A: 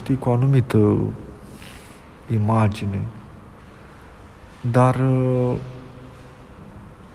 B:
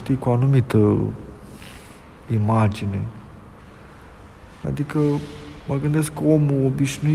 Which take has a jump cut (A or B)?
B